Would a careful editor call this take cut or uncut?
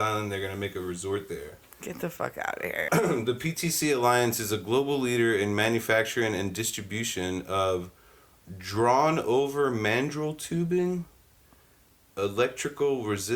cut